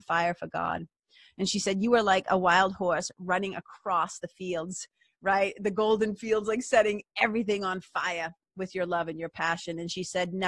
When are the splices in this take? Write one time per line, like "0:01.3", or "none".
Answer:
none